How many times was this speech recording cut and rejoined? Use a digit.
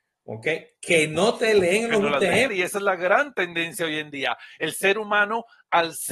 1